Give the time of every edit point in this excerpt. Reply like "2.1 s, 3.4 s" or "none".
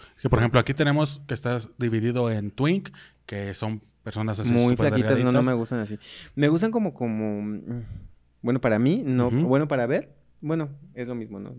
none